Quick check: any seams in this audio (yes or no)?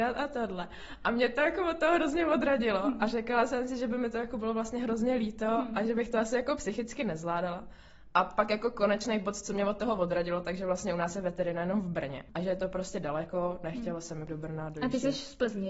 no